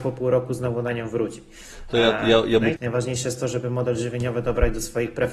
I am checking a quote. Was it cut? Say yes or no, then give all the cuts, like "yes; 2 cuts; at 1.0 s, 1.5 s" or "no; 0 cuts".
yes; 1 cut; at 2.8 s